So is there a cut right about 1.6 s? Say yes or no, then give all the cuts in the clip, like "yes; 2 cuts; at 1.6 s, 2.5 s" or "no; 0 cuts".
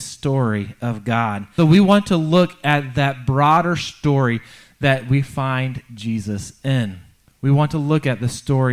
yes; 1 cut; at 1.6 s